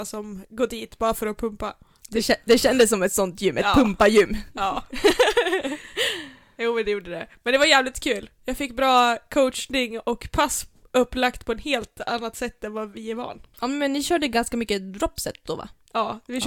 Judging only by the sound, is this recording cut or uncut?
uncut